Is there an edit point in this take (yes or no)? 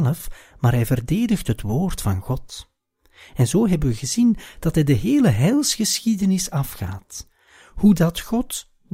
no